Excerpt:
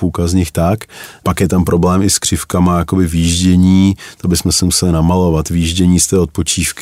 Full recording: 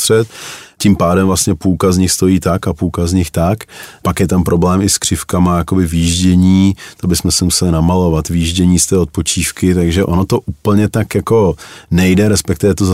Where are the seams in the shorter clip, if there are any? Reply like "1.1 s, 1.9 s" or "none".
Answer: none